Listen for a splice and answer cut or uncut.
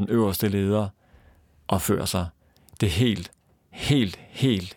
uncut